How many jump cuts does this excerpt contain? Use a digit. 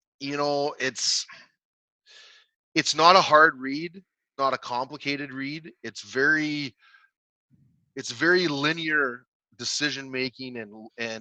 0